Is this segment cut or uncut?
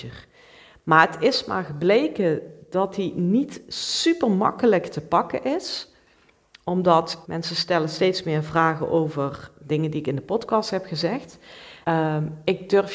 cut